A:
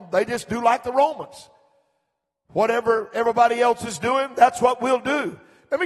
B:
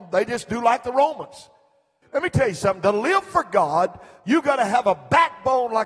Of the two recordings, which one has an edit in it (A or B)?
B